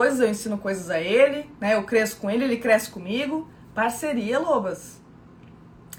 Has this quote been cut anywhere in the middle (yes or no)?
no